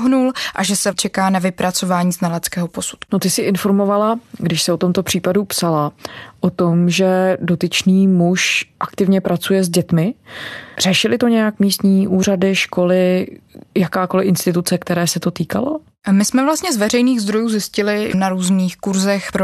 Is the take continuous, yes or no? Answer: no